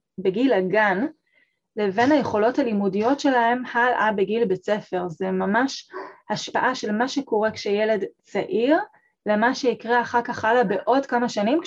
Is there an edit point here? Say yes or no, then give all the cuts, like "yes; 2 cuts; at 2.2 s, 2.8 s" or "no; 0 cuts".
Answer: no; 0 cuts